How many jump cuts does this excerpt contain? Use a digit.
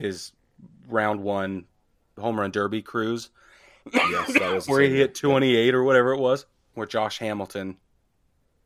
1